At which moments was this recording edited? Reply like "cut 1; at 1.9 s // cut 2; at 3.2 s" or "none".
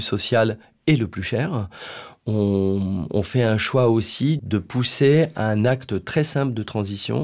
cut 1; at 4.4 s